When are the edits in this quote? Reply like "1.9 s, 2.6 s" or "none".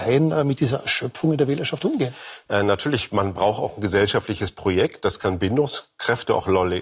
2.5 s